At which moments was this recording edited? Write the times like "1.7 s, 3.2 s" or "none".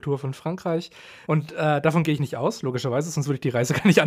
1.3 s